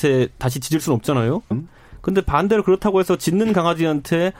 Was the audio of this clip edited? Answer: yes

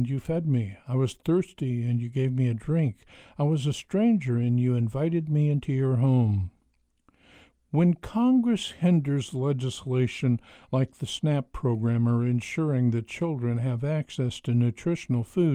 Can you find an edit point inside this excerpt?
no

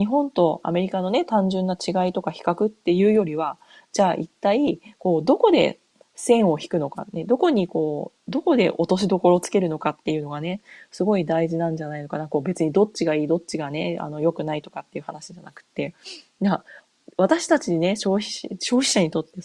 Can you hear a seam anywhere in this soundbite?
no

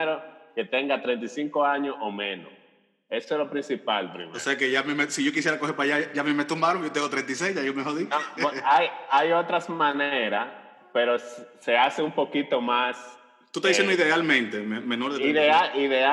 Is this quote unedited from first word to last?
yes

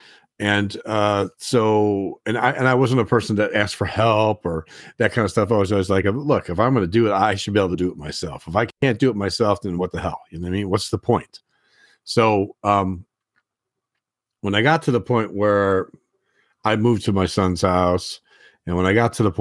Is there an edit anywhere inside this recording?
no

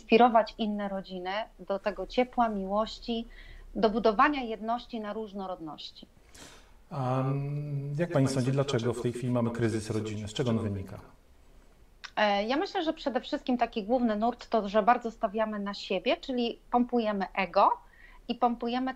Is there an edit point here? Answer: no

